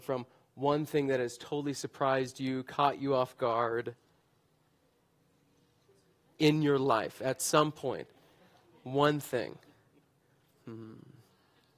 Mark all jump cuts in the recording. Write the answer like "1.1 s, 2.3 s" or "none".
none